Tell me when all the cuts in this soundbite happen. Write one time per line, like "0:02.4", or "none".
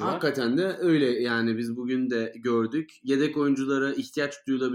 none